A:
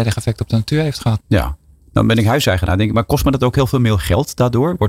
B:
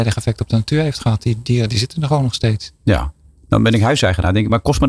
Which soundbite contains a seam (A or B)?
A